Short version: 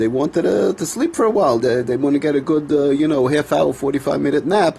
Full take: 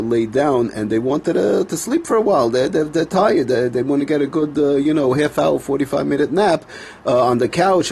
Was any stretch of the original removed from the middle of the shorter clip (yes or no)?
yes